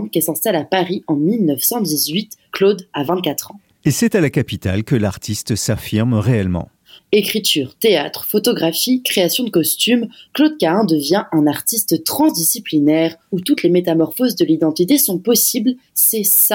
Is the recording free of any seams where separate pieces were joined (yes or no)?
no